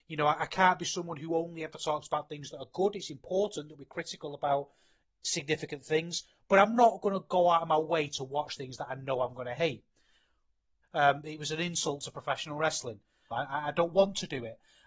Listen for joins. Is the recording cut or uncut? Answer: cut